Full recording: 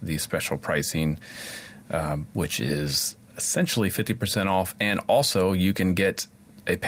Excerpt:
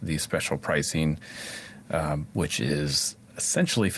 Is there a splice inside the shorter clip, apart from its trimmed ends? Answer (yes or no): no